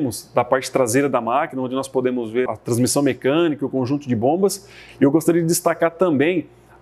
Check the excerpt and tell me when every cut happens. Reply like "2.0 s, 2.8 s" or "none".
2.5 s